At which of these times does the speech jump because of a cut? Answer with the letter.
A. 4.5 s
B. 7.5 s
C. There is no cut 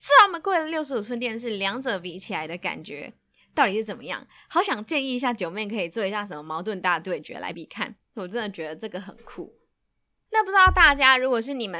B